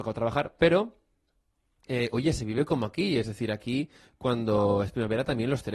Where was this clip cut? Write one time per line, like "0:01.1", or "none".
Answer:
none

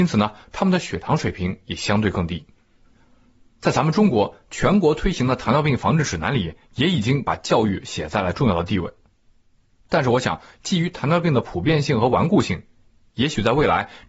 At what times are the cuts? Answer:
none

